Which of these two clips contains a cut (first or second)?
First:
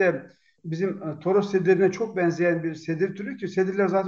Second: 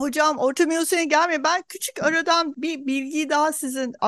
second